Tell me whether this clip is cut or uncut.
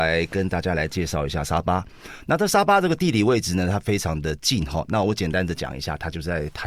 uncut